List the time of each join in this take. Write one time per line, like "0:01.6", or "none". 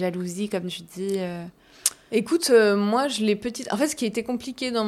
none